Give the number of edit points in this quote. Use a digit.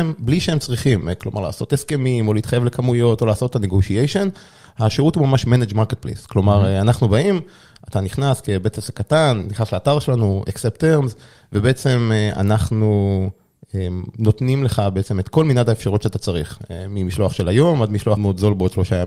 1